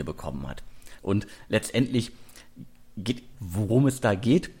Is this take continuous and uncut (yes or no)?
no